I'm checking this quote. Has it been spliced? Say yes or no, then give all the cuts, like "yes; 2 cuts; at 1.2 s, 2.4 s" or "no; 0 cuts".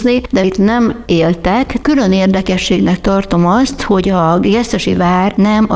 yes; 1 cut; at 1.8 s